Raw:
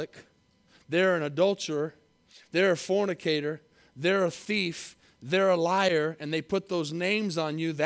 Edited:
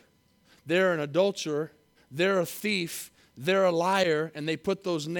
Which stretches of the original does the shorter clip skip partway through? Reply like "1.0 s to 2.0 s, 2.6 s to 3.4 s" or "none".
2.2 s to 3.8 s